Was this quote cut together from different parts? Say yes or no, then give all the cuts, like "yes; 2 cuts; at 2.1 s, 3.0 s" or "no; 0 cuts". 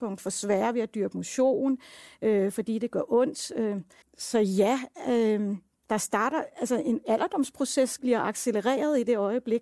yes; 2 cuts; at 4.0 s, 8.0 s